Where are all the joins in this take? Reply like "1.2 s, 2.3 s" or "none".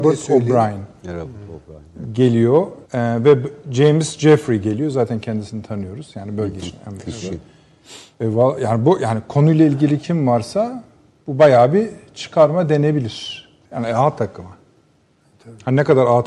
2.9 s, 13.7 s